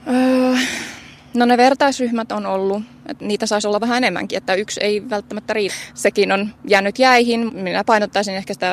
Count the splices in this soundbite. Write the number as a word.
two